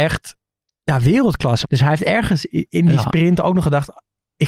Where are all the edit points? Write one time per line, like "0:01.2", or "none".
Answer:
0:01.6

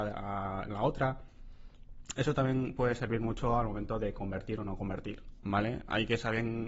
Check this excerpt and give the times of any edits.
0:05.4

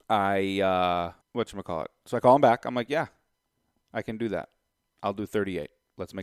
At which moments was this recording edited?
0:01.2

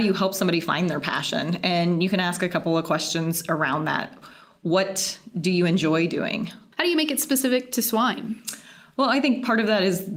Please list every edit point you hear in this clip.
0:06.7

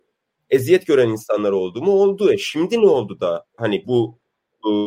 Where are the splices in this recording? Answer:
0:03.8

